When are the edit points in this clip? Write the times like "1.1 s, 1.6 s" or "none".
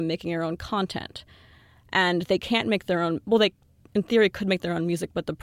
none